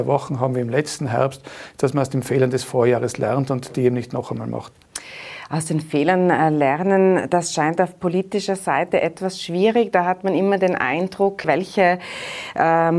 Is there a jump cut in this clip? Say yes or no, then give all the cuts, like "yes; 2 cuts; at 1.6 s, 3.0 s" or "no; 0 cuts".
yes; 1 cut; at 11.4 s